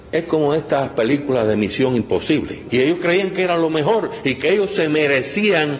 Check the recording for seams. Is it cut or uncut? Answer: cut